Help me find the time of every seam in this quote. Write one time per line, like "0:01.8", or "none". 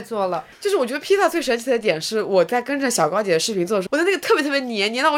0:03.9